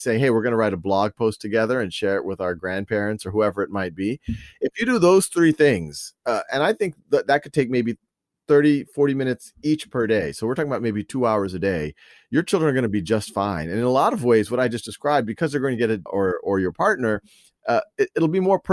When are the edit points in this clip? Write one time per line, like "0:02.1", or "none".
0:16.1